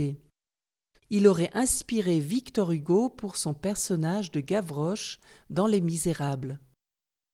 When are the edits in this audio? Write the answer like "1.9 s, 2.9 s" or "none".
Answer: 1.0 s

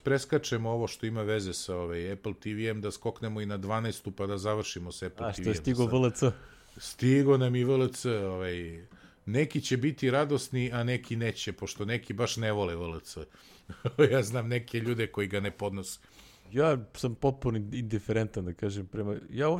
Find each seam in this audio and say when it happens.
none

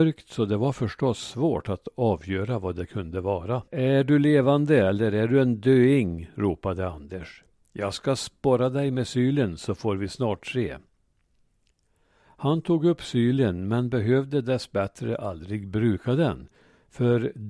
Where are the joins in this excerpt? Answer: 3.7 s

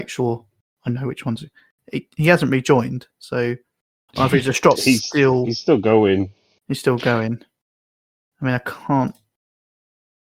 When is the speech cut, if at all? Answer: 4.7 s

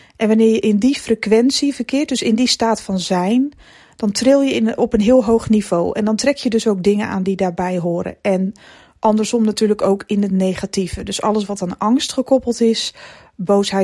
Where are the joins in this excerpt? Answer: none

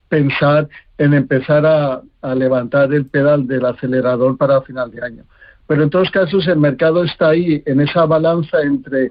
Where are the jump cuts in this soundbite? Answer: none

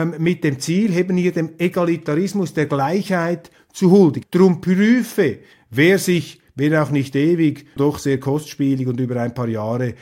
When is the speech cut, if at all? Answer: 4.2 s, 7.8 s

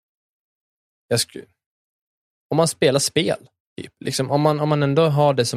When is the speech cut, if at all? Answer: none

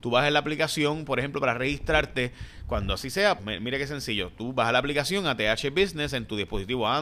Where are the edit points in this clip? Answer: 3.4 s

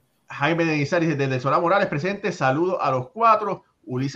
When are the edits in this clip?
none

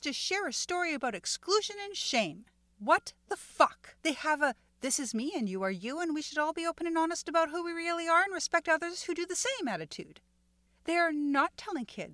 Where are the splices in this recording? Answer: 4.0 s

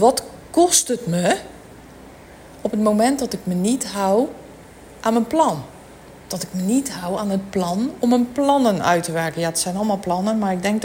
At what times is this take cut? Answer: none

